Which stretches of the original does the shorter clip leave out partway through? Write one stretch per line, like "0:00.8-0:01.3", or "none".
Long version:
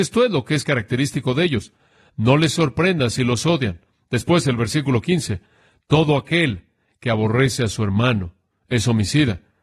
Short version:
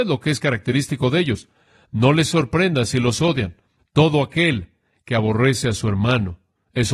0:04.0-0:05.7